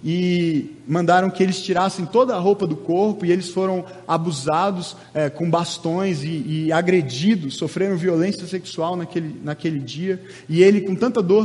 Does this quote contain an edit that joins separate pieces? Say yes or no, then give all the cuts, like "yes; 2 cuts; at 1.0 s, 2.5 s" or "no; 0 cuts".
no; 0 cuts